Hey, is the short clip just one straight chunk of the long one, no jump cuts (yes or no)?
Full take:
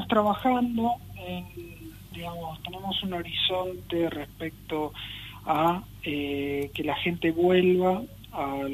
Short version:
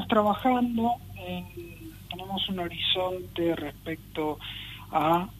no